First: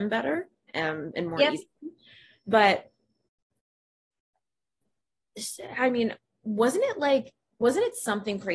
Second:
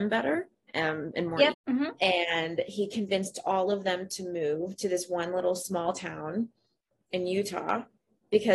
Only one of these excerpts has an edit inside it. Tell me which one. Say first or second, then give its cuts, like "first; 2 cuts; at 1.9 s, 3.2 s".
second; 1 cut; at 1.5 s